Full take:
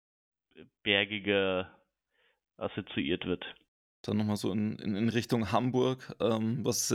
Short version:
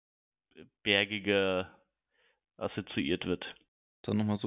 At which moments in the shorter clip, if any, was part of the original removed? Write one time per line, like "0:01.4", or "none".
none